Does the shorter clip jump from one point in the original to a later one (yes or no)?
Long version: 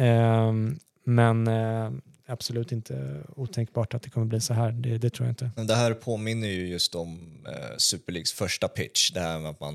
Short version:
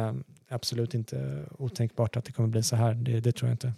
no